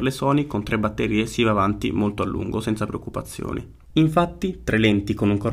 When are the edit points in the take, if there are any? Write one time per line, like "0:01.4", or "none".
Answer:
0:03.9